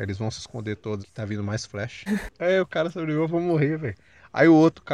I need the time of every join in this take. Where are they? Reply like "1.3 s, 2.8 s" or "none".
1.0 s, 2.1 s